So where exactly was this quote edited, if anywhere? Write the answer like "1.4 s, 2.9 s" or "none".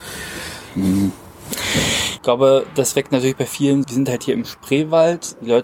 2.2 s, 3.8 s